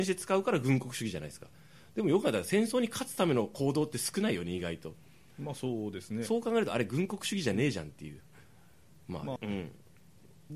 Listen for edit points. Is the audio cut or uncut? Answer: cut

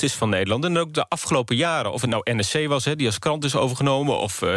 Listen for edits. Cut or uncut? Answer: uncut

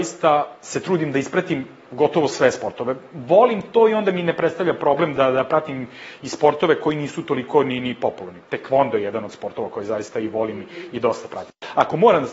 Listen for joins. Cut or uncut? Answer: uncut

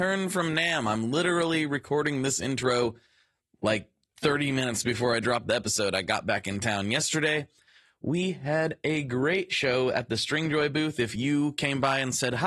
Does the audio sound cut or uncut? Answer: uncut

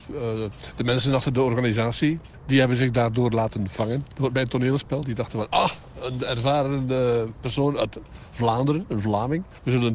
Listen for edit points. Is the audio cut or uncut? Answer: uncut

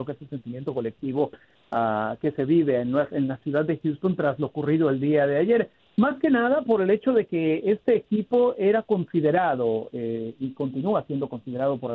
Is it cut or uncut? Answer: uncut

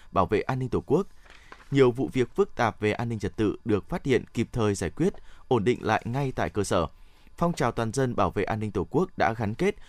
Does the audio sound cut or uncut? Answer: uncut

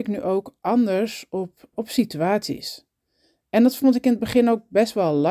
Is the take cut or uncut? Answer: cut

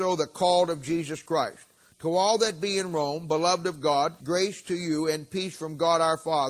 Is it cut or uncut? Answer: cut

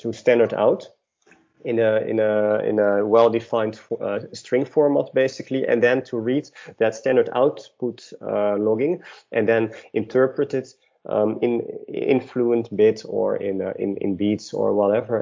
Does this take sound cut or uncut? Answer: uncut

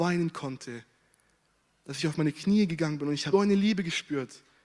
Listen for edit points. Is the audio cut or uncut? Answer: cut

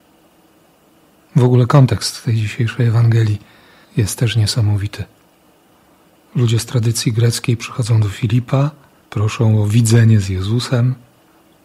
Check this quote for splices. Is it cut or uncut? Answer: uncut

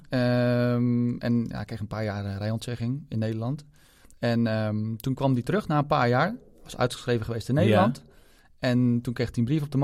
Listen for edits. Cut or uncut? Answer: uncut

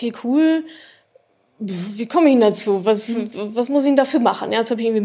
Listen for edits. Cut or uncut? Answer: uncut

